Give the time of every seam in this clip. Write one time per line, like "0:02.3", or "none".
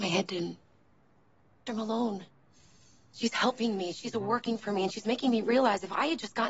0:01.7